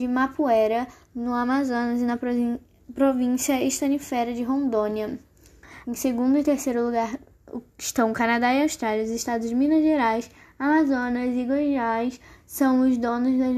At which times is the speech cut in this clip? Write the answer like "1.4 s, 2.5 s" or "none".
5.8 s